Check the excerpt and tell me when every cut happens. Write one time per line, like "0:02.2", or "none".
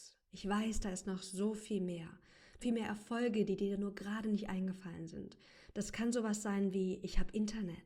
0:02.6
0:05.7